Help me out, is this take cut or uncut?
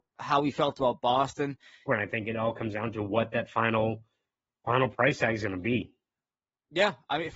cut